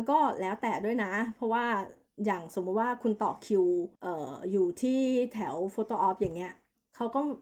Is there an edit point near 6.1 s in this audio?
no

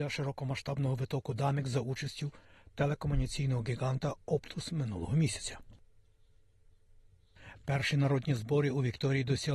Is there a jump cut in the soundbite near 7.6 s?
no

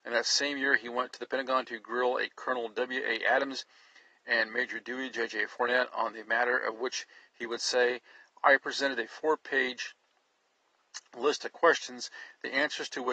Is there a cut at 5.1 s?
no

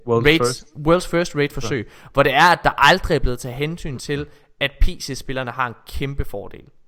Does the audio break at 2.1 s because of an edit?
no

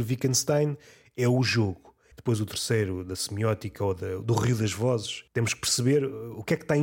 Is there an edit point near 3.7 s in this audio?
no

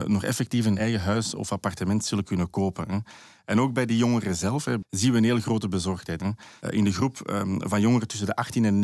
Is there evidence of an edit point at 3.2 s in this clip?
no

